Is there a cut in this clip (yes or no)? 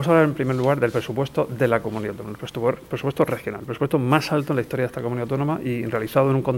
no